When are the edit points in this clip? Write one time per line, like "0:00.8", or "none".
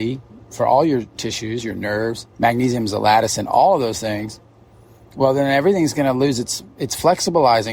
0:02.3